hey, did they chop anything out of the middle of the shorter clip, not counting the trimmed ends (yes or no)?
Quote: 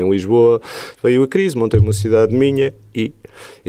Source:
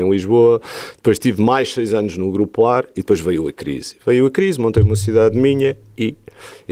yes